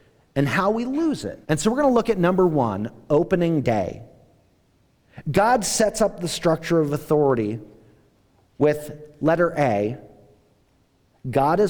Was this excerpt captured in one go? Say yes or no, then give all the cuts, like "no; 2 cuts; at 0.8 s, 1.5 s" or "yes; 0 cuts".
no; 1 cut; at 1.4 s